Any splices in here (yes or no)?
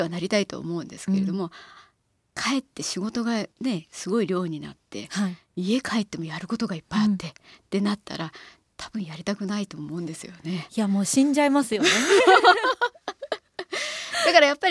yes